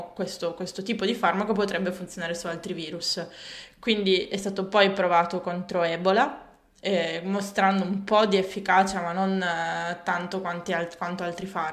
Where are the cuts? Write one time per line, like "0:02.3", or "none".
none